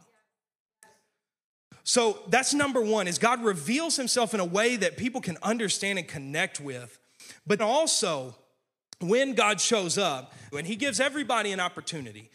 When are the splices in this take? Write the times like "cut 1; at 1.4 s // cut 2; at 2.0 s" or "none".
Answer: cut 1; at 7.6 s // cut 2; at 10.5 s